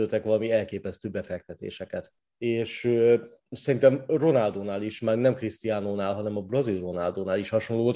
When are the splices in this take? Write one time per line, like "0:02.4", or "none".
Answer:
0:02.2